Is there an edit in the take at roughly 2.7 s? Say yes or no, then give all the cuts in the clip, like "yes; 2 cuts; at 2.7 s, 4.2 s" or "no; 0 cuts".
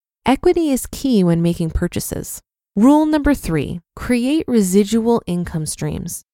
yes; 2 cuts; at 2.7 s, 3.8 s